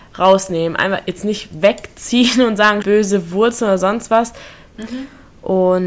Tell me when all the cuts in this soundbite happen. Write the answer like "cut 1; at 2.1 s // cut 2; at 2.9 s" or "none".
cut 1; at 2.8 s // cut 2; at 4.7 s